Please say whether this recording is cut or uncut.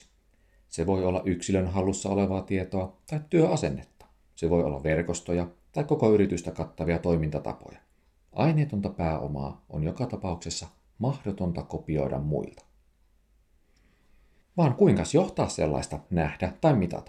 cut